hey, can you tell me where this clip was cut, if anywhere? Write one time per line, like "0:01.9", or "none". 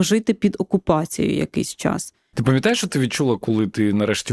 0:02.3